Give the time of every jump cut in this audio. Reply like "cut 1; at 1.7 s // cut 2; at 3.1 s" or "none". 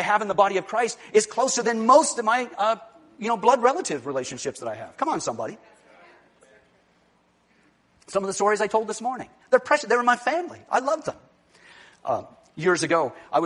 none